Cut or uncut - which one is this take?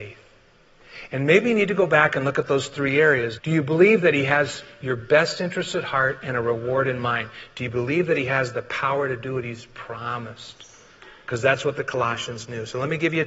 cut